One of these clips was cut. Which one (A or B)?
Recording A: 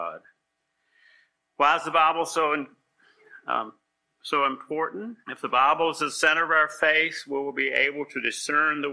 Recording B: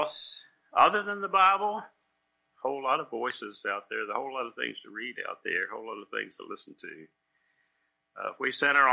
A